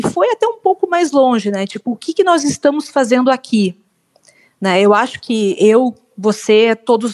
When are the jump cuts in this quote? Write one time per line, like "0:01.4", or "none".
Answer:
none